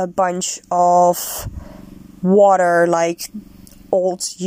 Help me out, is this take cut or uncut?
uncut